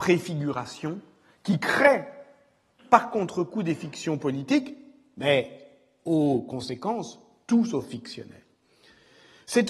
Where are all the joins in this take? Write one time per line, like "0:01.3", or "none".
none